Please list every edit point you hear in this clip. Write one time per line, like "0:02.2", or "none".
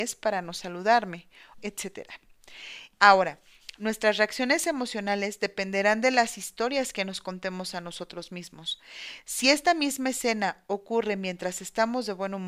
0:01.5
0:02.9